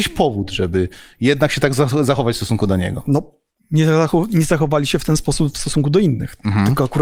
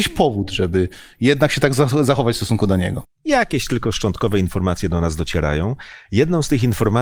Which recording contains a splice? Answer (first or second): second